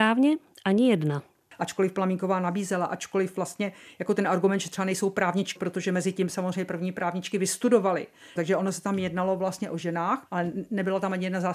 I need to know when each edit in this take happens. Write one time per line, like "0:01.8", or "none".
0:05.6
0:08.4
0:10.3